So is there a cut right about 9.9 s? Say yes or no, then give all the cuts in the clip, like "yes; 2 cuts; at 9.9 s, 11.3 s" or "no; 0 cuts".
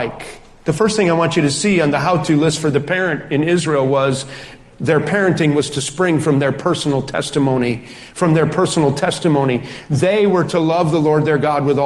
no; 0 cuts